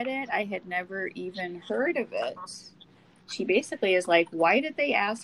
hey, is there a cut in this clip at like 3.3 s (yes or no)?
yes